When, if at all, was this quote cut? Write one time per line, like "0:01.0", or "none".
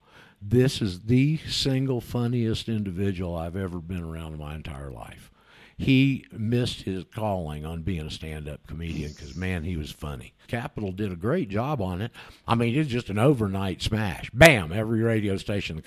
0:10.5